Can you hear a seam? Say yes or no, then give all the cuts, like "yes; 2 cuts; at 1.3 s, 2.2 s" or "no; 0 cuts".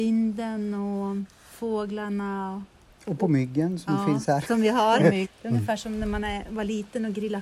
yes; 1 cut; at 5.2 s